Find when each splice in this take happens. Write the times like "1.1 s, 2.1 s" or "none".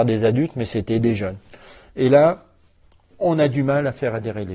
none